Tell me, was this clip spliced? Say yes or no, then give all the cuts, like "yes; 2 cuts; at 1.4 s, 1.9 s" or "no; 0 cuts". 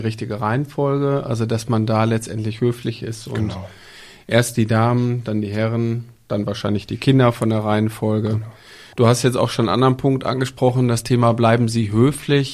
yes; 1 cut; at 8.9 s